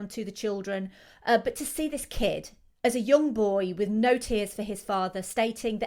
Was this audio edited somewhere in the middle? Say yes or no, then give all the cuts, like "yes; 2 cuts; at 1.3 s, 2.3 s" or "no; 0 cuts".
yes; 1 cut; at 2.7 s